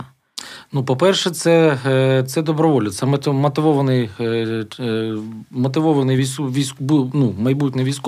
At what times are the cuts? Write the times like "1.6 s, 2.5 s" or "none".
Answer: none